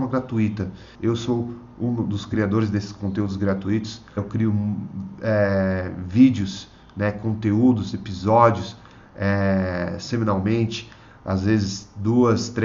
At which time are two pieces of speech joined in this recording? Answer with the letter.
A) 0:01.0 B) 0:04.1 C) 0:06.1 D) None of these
A